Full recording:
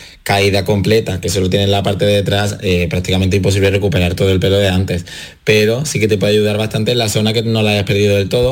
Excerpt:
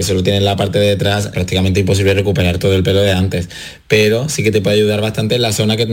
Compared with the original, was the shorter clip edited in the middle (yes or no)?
yes